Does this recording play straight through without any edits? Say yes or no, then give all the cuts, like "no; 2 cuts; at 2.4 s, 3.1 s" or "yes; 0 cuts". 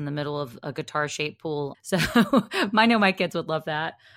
no; 1 cut; at 1.7 s